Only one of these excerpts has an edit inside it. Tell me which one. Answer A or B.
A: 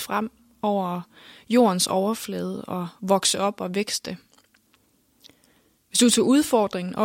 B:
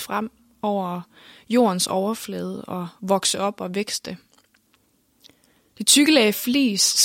B